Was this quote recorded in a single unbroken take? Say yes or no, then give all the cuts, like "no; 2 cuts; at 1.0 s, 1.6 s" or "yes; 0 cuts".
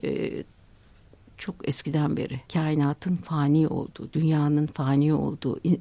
no; 1 cut; at 2.4 s